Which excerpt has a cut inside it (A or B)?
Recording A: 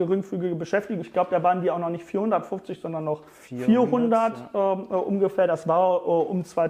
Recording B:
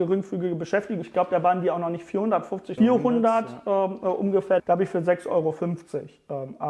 B